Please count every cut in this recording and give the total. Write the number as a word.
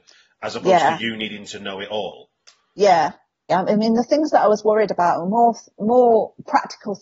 one